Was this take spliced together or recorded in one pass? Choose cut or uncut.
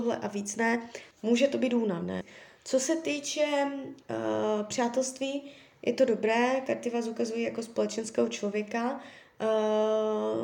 cut